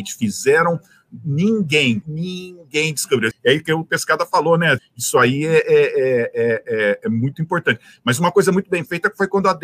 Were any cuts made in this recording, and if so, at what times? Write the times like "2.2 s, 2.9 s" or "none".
2.0 s, 3.3 s, 4.8 s